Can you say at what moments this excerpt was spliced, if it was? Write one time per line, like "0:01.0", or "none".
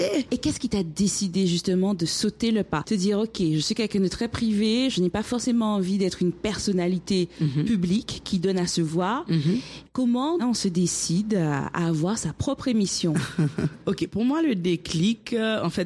0:10.4